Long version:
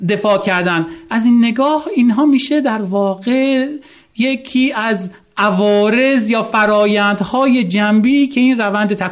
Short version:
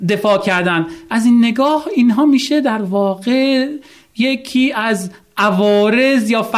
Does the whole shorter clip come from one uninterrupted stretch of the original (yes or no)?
yes